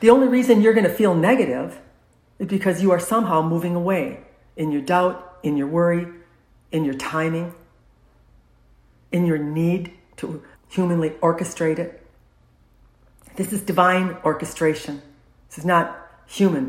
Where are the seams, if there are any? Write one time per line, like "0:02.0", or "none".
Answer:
0:10.5